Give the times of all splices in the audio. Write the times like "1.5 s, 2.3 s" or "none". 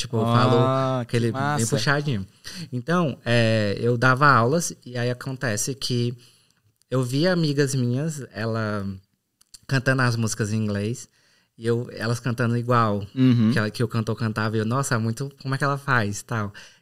none